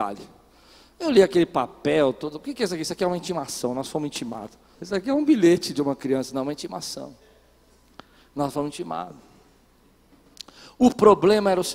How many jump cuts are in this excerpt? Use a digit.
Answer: 1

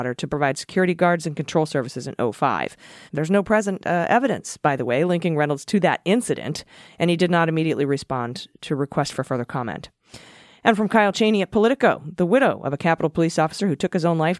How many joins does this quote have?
1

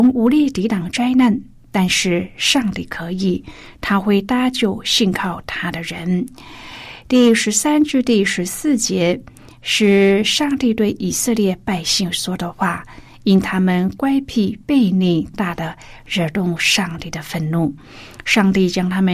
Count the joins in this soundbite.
1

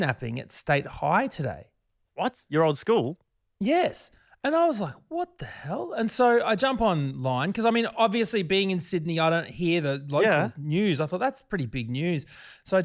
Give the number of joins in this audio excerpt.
0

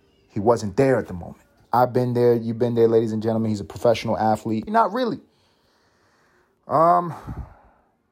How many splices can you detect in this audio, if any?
2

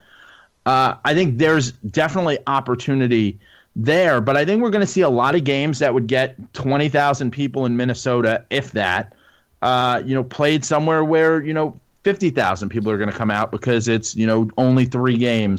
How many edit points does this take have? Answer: 0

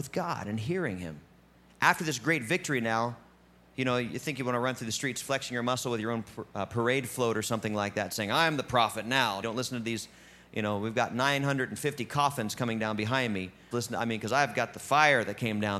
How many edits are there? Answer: 2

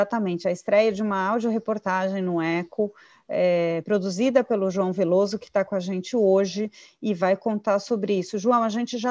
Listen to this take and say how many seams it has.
0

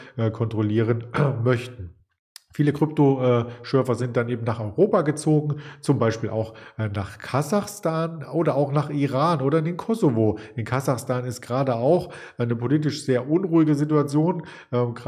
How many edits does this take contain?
0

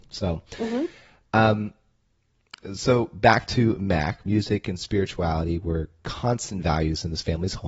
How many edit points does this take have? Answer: 1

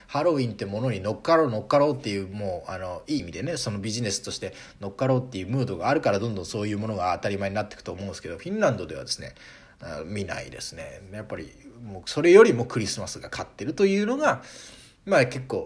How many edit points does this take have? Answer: 1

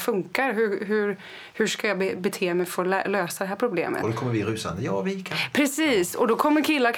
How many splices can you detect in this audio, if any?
0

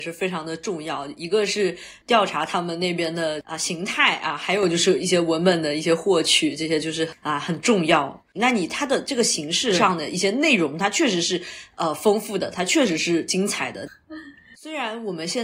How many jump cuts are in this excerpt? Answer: 2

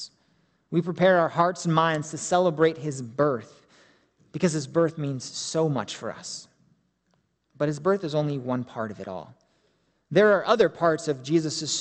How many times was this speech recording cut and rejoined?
0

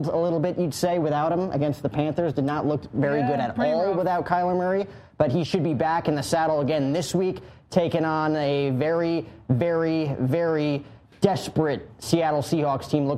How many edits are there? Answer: 0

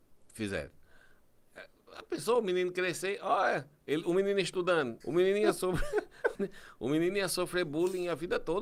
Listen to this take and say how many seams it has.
2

